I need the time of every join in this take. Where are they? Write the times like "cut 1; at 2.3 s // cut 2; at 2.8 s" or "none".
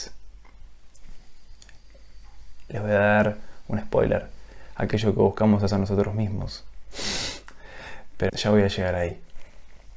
cut 1; at 8.3 s